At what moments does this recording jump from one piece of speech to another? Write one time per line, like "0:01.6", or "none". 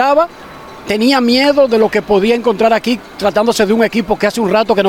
none